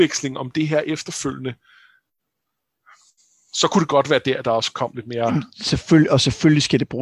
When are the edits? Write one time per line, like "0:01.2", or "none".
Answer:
none